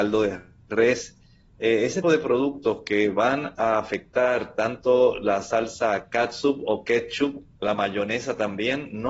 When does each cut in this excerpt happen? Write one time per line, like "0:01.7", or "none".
0:02.0